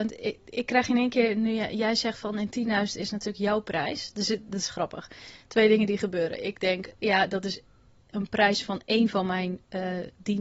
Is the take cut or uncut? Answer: uncut